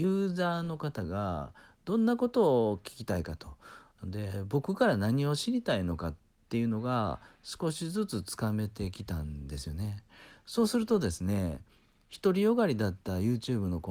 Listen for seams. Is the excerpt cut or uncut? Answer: uncut